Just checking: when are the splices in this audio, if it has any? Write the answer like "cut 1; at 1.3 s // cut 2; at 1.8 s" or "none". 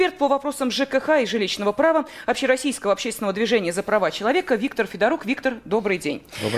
none